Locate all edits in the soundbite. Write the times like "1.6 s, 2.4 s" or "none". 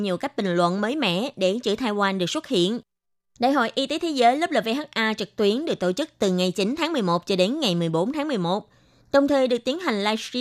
none